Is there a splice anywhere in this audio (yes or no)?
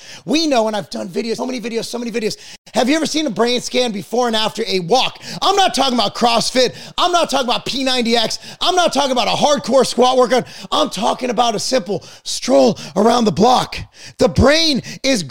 yes